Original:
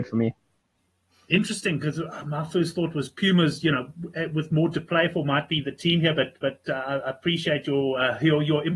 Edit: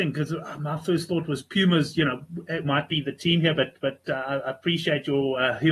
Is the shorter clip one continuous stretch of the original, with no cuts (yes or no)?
no